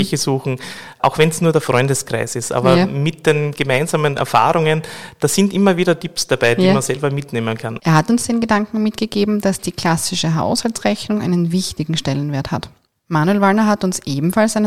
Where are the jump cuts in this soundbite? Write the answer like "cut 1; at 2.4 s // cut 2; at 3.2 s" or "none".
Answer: cut 1; at 1.0 s // cut 2; at 7.8 s